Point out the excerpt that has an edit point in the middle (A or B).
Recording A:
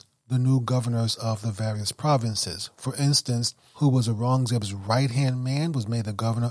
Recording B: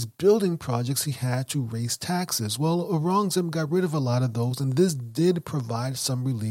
A